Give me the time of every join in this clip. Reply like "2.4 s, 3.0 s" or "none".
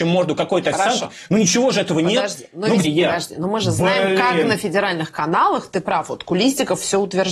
2.8 s